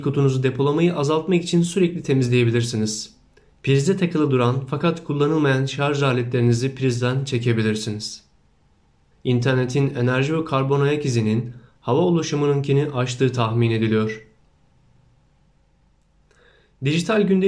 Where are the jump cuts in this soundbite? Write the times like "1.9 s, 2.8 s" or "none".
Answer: 3.5 s, 9.1 s